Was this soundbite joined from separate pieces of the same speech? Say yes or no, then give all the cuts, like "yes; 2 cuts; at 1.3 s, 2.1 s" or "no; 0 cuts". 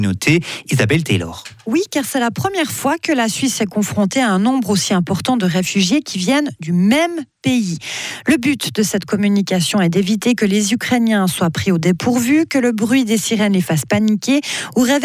no; 0 cuts